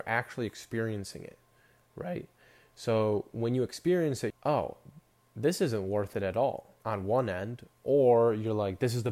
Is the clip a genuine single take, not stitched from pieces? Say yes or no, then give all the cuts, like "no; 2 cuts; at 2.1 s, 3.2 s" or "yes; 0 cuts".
no; 2 cuts; at 4.3 s, 6.8 s